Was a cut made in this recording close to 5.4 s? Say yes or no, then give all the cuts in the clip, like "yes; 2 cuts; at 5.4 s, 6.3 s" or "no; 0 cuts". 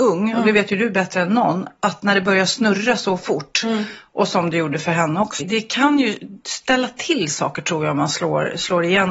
yes; 1 cut; at 5.4 s